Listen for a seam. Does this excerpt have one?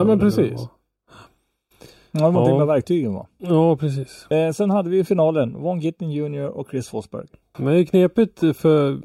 yes; 2 cuts; at 4.3 s, 7.5 s

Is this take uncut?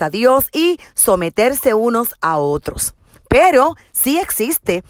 yes; 0 cuts

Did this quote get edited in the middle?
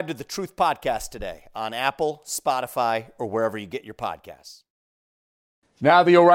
no; 0 cuts

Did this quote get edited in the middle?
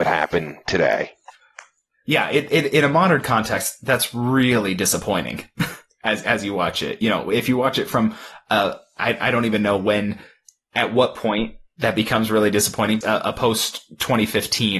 yes; 1 cut; at 13.0 s

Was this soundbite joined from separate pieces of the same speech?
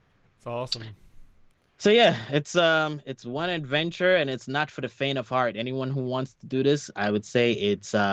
no; 0 cuts

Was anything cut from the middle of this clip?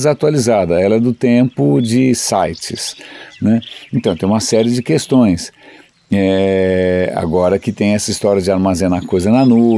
no; 0 cuts

